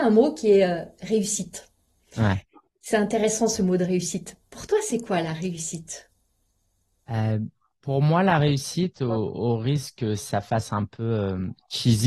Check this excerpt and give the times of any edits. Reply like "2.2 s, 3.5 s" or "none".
none